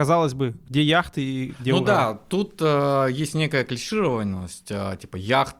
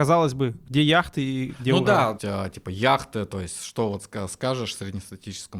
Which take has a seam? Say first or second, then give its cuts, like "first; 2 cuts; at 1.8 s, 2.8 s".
second; 1 cut; at 2.2 s